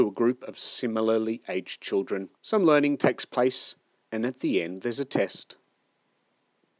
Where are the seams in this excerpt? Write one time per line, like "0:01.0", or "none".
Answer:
0:02.4